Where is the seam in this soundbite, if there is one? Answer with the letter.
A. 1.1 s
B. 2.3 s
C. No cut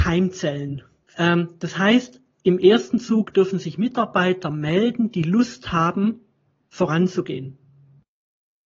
A